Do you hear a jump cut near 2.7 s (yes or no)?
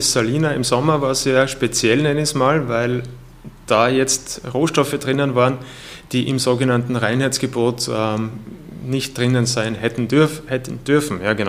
no